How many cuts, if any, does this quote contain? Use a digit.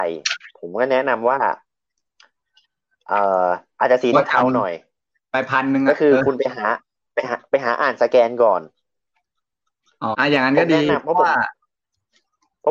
1